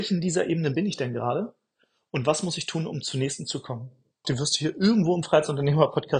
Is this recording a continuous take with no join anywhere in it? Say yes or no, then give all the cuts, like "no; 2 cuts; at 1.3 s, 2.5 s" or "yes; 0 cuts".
no; 1 cut; at 4.2 s